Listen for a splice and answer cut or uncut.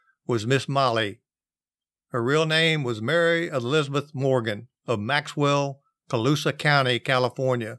uncut